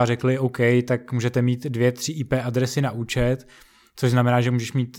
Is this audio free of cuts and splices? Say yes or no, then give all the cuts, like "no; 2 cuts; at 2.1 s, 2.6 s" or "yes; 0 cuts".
yes; 0 cuts